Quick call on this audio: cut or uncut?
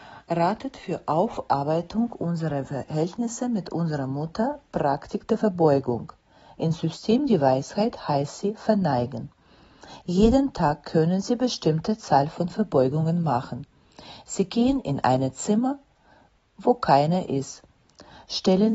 uncut